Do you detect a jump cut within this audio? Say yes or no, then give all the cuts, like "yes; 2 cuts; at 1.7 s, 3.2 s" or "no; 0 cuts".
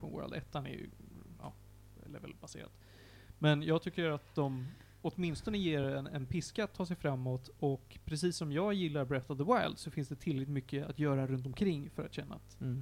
no; 0 cuts